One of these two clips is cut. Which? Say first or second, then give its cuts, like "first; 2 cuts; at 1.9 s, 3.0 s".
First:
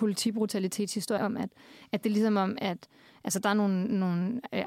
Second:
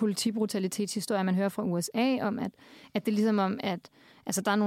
first; 1 cut; at 1.2 s